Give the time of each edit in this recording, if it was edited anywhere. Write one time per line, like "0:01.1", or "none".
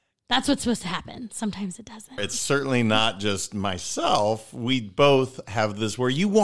0:02.2